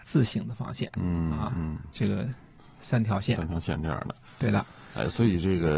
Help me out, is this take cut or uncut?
uncut